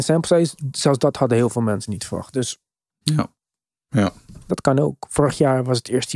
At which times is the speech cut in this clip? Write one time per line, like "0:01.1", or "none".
0:03.0
0:04.5